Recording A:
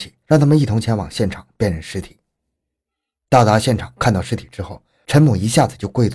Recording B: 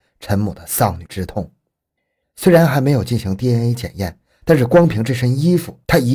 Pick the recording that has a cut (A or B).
B